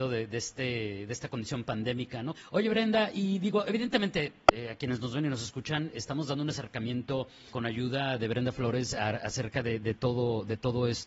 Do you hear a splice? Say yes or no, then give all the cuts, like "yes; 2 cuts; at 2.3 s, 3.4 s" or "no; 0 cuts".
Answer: yes; 2 cuts; at 2.4 s, 7.5 s